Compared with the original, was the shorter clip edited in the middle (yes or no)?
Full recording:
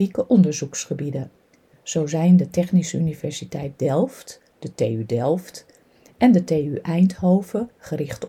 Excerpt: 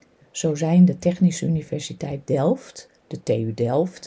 no